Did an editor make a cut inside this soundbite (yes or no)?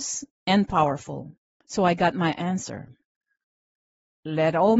yes